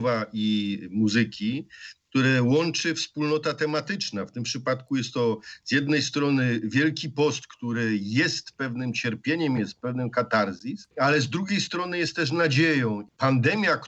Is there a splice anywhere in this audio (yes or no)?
yes